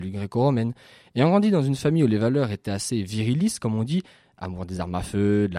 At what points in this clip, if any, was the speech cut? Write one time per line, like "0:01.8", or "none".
none